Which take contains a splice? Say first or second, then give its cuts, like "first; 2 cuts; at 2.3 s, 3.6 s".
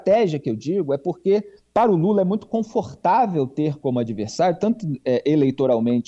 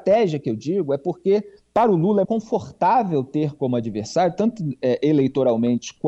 second; 1 cut; at 2.2 s